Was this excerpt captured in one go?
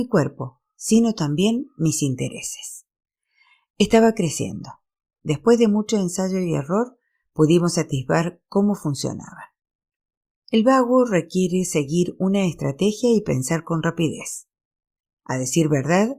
no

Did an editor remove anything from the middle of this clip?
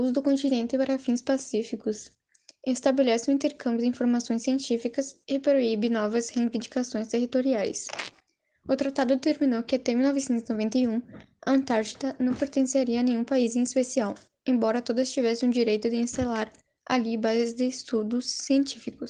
no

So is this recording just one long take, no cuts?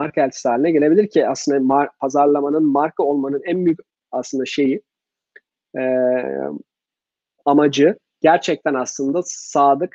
yes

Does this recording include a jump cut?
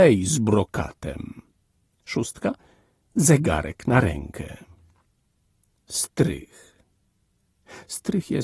no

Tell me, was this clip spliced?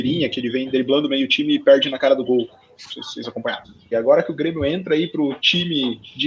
yes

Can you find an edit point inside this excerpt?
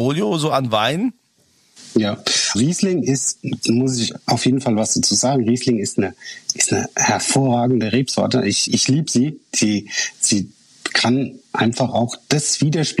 yes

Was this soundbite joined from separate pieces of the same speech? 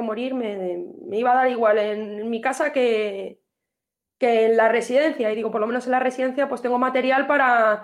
no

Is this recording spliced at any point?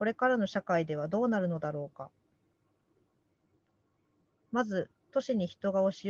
yes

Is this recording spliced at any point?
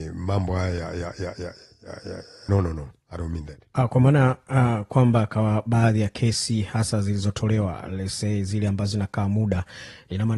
yes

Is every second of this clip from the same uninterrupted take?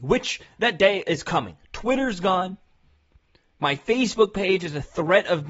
no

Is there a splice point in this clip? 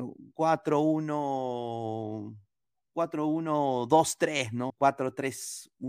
yes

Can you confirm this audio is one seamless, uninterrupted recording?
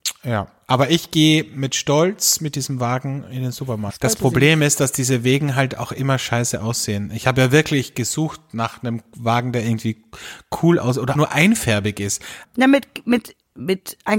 no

